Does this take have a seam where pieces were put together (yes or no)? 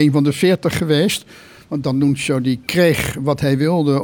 no